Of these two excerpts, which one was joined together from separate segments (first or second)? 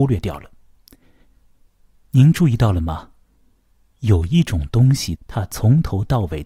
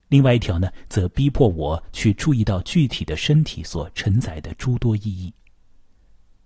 first